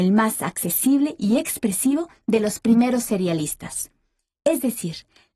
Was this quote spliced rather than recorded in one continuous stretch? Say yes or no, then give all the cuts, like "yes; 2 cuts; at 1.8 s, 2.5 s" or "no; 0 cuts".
no; 0 cuts